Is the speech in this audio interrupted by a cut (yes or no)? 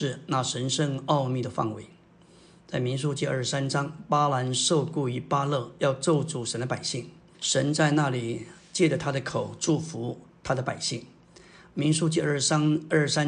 yes